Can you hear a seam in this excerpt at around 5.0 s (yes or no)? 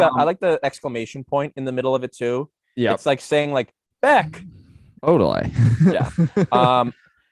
yes